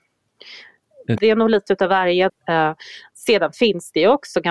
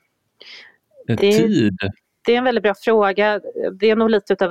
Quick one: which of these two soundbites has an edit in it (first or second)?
first